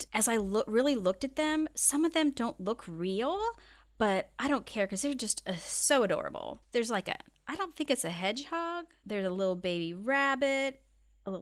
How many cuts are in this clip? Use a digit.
0